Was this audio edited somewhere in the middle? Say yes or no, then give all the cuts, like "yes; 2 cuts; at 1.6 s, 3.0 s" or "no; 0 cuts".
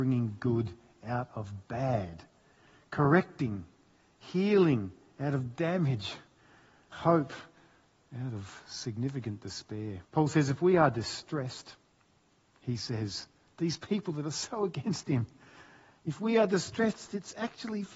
yes; 3 cuts; at 6.9 s, 10.0 s, 12.5 s